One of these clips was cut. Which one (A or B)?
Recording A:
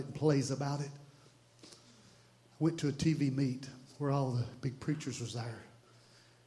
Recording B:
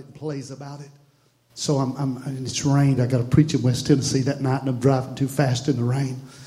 B